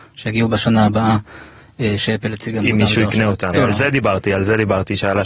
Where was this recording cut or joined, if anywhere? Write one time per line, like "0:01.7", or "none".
0:03.5